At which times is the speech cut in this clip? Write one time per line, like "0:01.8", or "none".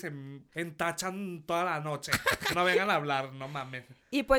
none